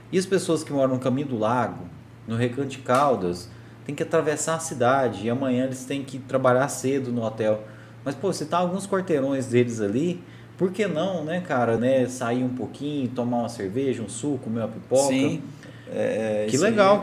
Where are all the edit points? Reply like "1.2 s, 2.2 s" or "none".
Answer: 11.8 s